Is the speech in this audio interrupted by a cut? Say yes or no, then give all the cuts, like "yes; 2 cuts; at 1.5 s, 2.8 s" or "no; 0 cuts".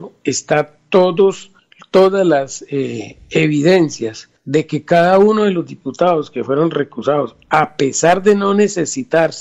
no; 0 cuts